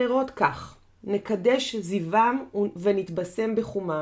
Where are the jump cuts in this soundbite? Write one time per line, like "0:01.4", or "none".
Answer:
0:01.0